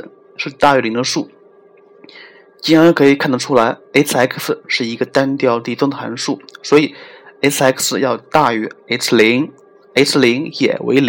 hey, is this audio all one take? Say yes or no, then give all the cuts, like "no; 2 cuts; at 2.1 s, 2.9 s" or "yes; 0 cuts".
yes; 0 cuts